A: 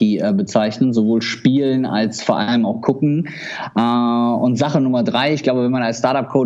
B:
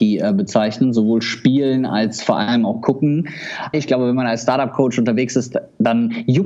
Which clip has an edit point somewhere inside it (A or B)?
B